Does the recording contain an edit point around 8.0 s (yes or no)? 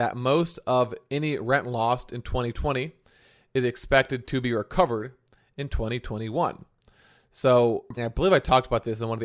yes